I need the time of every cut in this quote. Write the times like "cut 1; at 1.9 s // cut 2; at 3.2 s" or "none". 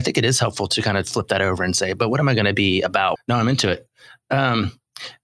cut 1; at 3.2 s

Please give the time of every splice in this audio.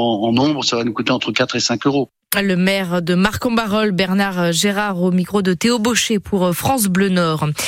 none

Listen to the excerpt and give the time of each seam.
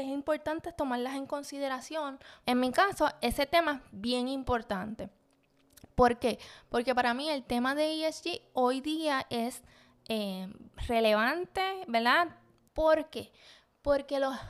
cut 1; at 2.4 s // cut 2; at 12.7 s

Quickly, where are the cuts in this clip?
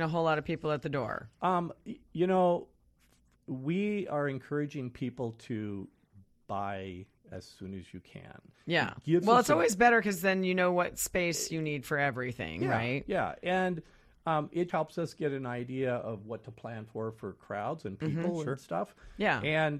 cut 1; at 1.3 s // cut 2; at 14.7 s

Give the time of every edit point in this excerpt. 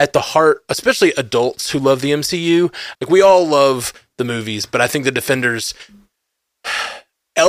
cut 1; at 2.9 s

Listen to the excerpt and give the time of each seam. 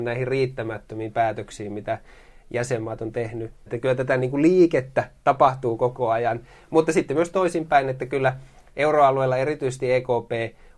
cut 1; at 3.7 s

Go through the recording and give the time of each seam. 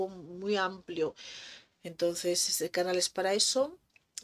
cut 1; at 1.7 s

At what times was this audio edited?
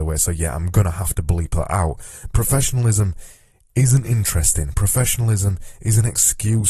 cut 1; at 2.3 s

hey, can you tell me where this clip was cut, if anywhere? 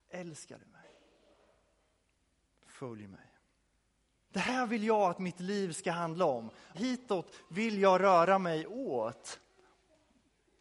cut 1; at 4.3 s // cut 2; at 6.7 s

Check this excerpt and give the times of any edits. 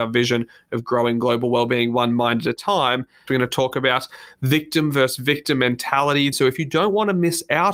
cut 1; at 3.3 s // cut 2; at 6.3 s

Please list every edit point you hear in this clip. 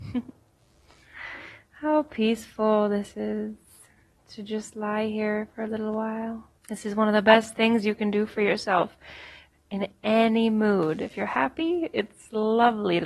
cut 1; at 6.6 s

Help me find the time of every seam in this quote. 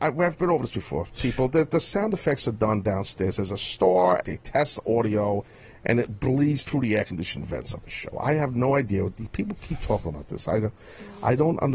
cut 1; at 4.2 s

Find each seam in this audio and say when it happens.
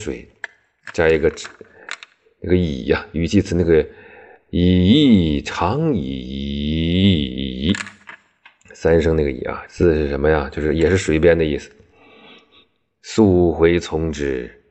cut 1; at 9.7 s

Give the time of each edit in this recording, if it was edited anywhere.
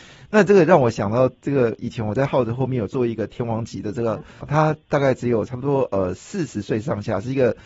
cut 1; at 4.4 s

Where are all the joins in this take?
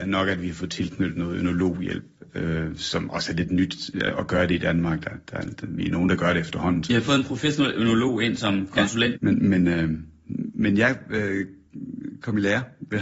cut 1; at 9.2 s

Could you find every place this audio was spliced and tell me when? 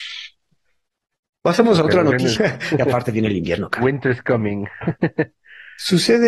cut 1; at 2.4 s

